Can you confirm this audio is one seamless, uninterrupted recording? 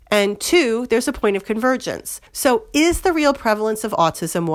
no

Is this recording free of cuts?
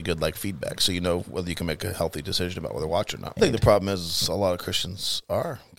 no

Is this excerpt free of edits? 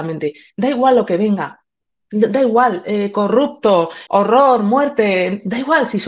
no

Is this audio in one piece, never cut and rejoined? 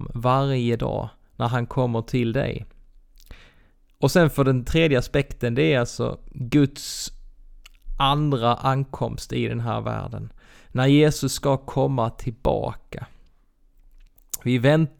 no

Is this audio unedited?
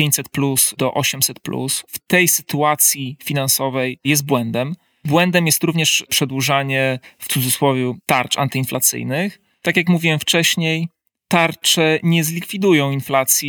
yes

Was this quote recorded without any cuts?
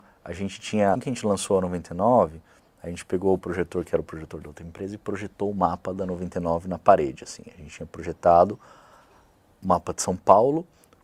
no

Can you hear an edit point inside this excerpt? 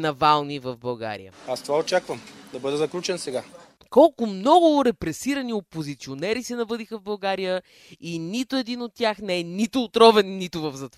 yes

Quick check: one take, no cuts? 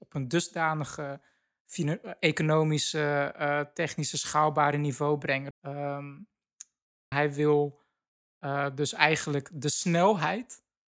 no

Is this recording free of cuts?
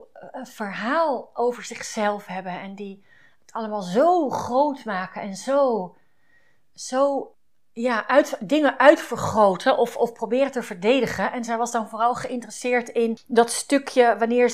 yes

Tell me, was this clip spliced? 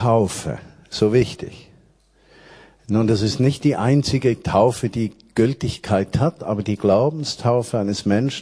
no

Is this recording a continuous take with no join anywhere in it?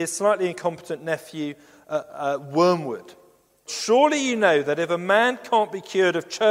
no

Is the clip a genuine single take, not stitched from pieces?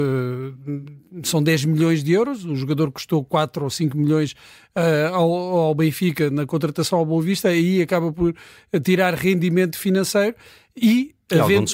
yes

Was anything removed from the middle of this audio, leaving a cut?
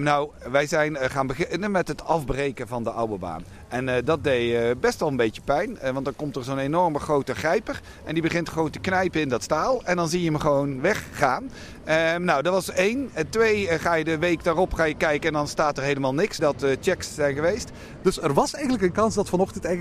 yes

